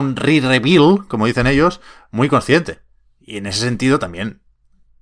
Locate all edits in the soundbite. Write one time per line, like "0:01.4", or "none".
none